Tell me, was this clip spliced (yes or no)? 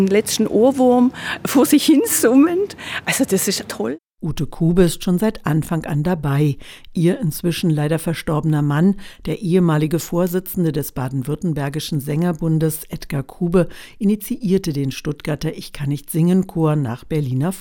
yes